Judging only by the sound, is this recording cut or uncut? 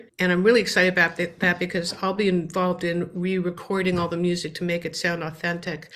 uncut